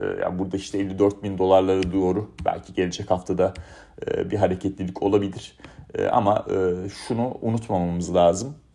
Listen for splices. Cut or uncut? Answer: uncut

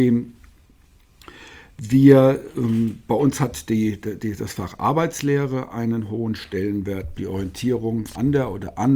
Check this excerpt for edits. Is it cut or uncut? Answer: cut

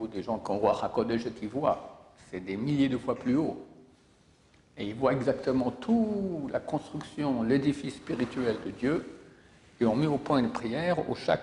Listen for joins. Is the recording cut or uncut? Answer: uncut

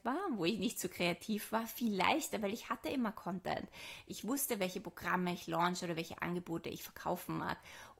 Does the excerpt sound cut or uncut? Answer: cut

